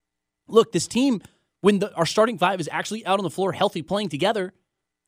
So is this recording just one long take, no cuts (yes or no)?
yes